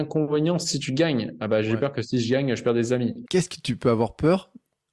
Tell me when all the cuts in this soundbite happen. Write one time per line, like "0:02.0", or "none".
0:03.3

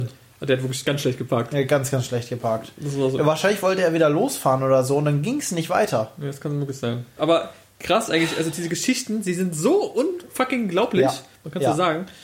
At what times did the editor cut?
0:07.2

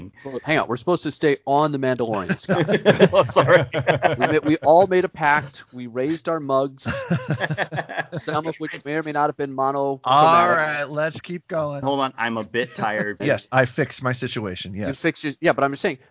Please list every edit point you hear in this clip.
0:11.8
0:13.2

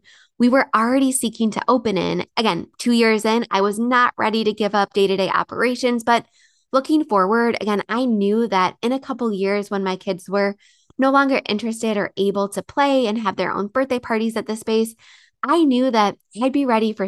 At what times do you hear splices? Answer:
0:02.3

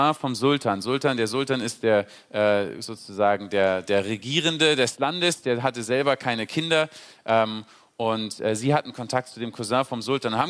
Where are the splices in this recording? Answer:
none

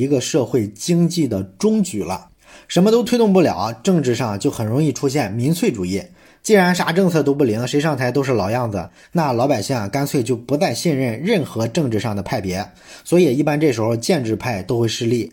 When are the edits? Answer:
none

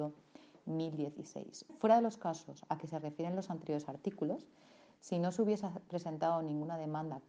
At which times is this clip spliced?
0:01.7

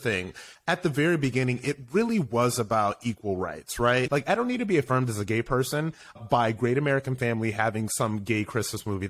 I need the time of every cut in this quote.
0:04.1
0:06.2

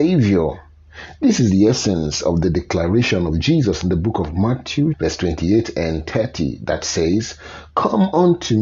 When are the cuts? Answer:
0:04.9

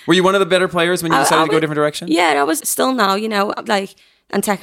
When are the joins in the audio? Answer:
0:02.6
0:03.7

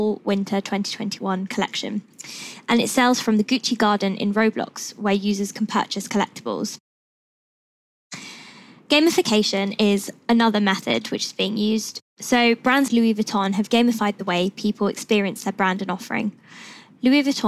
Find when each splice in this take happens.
0:12.9

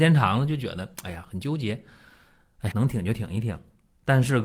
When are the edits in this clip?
0:01.2
0:02.7

